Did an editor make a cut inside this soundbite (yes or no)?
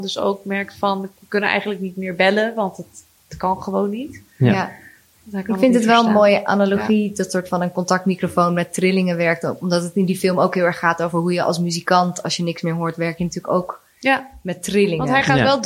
no